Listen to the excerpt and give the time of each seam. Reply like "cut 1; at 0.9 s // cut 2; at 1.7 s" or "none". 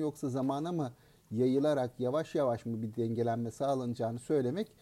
none